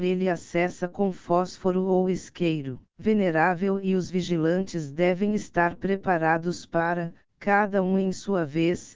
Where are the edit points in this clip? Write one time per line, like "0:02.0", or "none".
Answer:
0:02.9